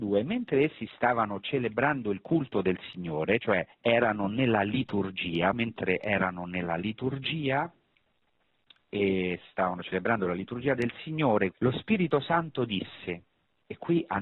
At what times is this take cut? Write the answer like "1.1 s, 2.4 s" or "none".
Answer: 3.7 s, 5.5 s, 11.5 s